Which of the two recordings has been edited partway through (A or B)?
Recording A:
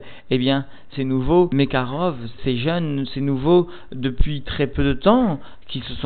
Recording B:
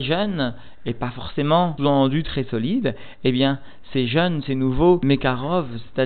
A